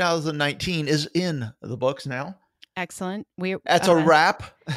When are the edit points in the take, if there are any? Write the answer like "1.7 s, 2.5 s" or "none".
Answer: none

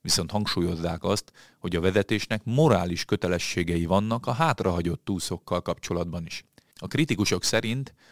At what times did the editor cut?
6.7 s

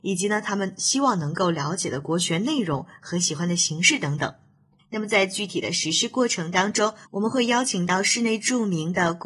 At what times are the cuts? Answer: 4.8 s, 7.0 s

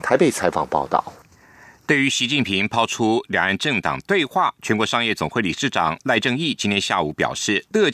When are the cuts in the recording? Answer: none

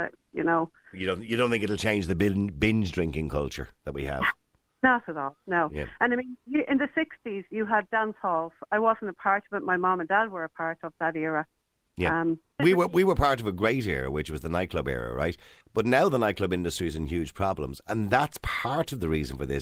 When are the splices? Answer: 12.6 s, 15.6 s

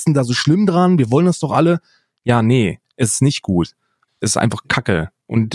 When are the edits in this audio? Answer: 4.1 s

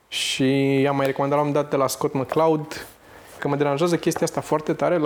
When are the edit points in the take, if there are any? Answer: 3.4 s

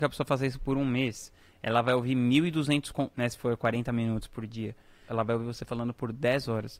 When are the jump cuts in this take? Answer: 3.1 s, 5.1 s

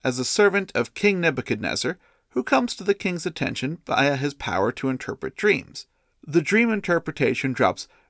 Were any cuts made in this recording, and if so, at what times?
6.1 s

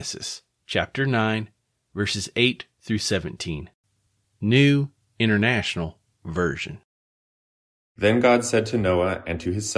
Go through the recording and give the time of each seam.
none

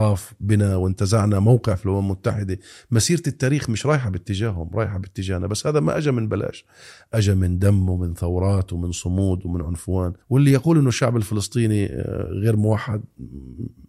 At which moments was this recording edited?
10.2 s

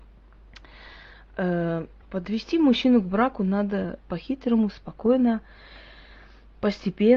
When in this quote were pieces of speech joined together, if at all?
2.0 s

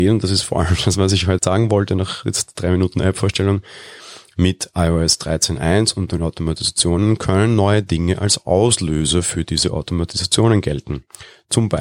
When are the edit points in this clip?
1.4 s

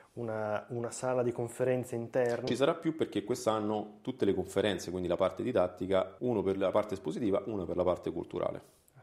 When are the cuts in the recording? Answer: 2.5 s, 6.2 s

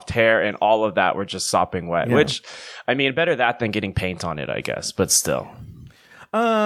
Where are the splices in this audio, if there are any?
none

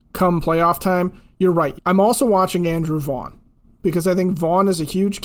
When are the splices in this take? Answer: 1.8 s

